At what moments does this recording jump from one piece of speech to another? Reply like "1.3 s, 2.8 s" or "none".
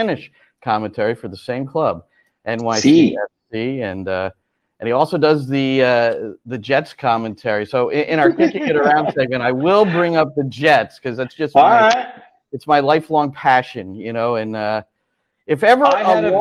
none